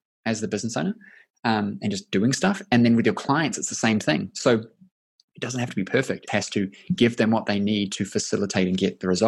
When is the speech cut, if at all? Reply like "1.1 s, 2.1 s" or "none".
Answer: 6.3 s